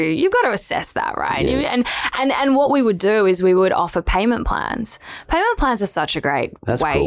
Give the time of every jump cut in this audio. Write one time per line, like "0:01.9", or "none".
none